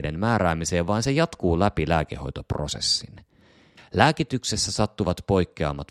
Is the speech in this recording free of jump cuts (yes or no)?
no